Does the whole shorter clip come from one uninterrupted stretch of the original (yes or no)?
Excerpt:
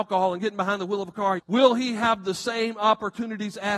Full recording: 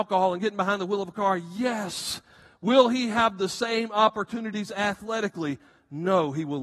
no